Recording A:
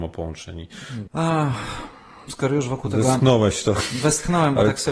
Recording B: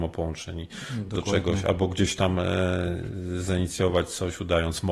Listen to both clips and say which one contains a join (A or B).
A